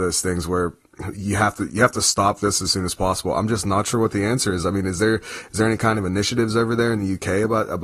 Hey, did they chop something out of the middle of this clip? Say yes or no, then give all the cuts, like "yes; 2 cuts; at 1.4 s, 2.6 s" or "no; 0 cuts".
no; 0 cuts